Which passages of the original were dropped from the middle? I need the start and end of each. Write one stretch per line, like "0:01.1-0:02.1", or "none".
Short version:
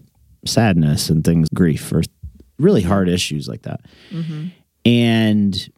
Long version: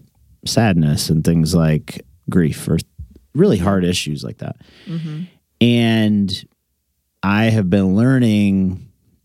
0:01.5-0:02.2

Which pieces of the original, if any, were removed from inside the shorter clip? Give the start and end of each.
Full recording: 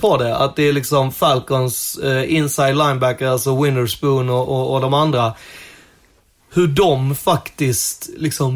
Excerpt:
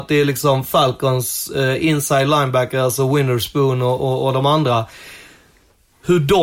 none

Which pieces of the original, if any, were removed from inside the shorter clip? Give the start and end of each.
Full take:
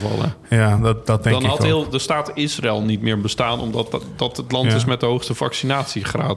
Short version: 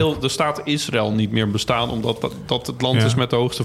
none

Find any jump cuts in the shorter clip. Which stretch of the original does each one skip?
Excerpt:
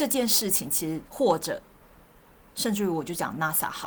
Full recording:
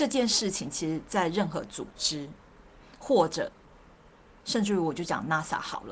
0:01.1-0:03.0

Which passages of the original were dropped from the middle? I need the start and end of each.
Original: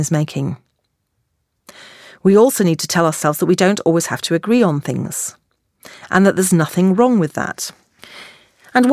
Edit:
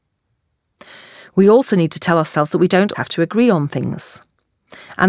0:03.8-0:04.1

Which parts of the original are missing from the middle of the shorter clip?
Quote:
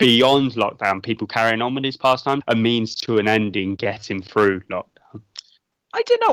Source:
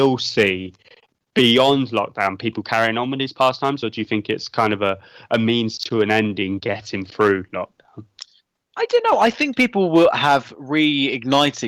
0:03.8-0:05.2

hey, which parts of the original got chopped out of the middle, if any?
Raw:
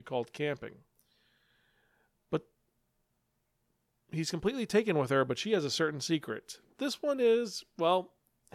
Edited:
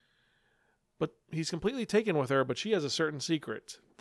0:02.5-0:04.0

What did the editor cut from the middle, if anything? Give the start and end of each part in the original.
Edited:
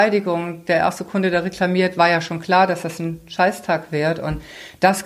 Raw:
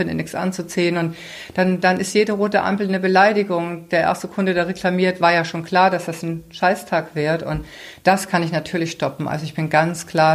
none

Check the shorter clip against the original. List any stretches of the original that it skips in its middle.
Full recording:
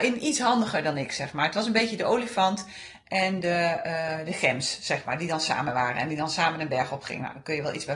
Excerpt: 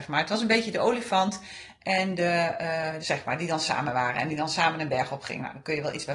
0:04.3-0:04.8

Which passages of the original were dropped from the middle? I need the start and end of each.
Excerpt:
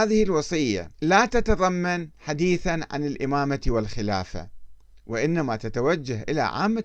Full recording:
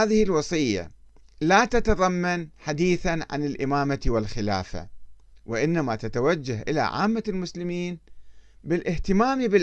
0:00.9-0:01.3

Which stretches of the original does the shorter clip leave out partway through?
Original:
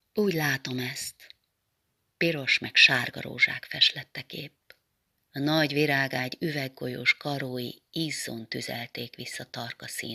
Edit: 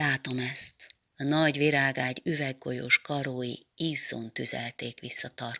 0:01.4-0:05.2

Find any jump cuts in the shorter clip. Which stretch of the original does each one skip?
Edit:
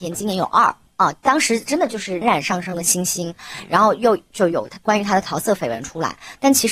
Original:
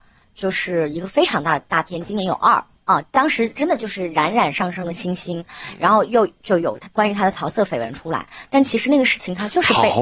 0:04.1-0:04.3

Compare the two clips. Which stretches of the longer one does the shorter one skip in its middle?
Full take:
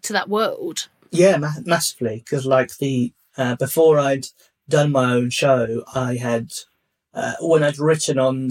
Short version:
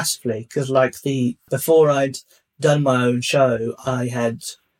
0:03.2-0:03.6

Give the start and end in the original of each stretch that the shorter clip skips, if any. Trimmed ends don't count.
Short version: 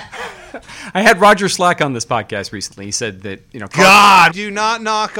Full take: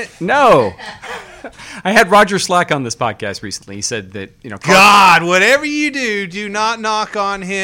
0:05.2-0:06.3

